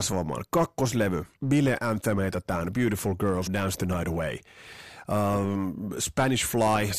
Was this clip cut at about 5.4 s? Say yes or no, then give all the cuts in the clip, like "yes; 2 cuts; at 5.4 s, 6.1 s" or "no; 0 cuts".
no; 2 cuts; at 1.3 s, 3.5 s